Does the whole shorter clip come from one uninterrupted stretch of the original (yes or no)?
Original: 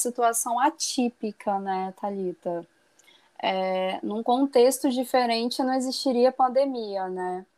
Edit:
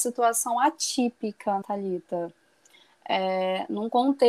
no